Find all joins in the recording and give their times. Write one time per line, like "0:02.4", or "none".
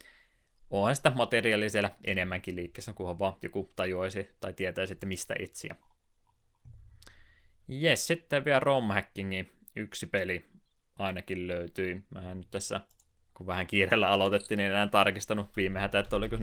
none

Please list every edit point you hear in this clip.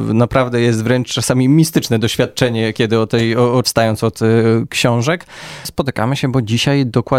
0:03.6

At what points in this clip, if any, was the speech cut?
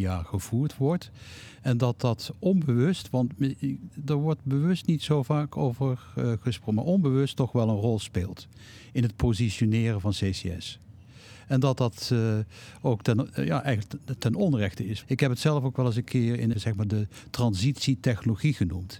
0:15.0
0:16.5

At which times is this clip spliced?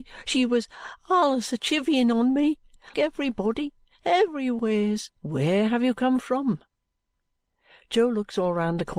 0:02.9
0:05.2

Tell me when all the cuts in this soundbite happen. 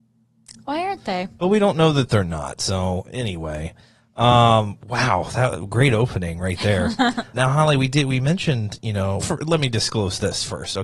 0:07.3
0:09.2

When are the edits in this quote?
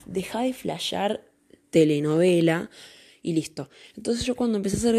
none

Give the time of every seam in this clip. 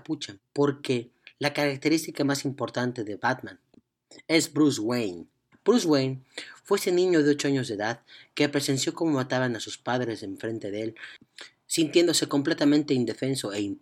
none

